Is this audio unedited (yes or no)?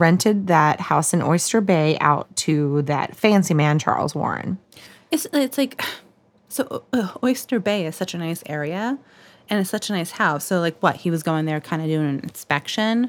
yes